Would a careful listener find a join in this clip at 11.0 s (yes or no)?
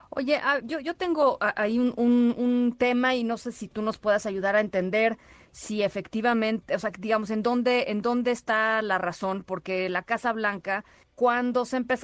yes